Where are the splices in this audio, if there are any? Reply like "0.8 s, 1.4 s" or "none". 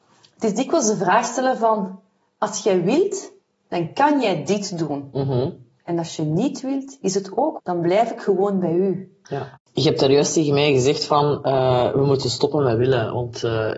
7.6 s, 9.2 s